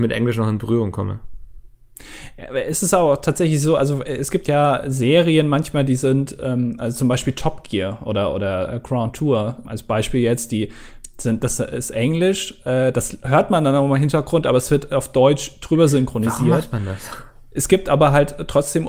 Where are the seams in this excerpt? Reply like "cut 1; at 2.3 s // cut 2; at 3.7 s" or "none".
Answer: cut 1; at 9.6 s